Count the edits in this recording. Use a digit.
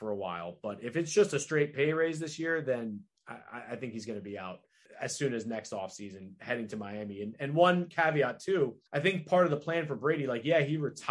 1